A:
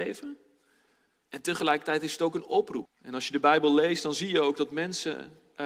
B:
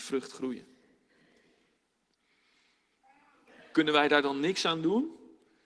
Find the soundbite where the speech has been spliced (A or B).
A